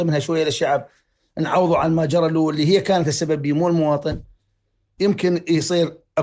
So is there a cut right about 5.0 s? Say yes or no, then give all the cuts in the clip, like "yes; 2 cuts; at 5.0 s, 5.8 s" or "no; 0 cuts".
yes; 1 cut; at 5.0 s